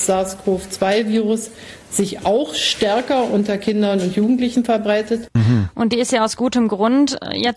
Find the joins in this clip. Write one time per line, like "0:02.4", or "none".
0:05.4